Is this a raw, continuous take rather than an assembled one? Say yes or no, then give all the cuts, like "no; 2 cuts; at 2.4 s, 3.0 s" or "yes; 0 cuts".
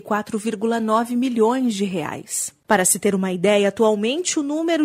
no; 1 cut; at 2.6 s